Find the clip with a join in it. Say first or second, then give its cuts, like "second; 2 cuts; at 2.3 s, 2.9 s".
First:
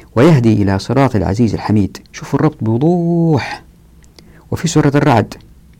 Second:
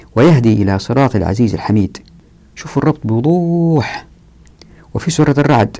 first; 1 cut; at 2.0 s